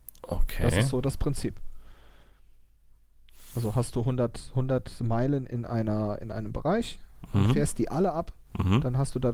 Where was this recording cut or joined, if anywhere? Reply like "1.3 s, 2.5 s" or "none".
none